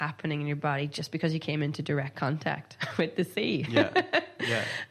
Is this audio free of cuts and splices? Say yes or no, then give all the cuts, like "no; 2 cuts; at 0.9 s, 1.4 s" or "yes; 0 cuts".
yes; 0 cuts